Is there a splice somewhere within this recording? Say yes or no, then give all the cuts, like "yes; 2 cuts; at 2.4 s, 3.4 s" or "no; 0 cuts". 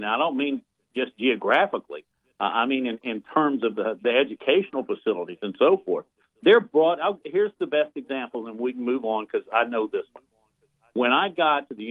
no; 0 cuts